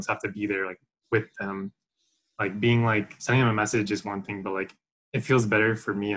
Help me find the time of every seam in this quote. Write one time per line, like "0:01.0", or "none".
0:03.2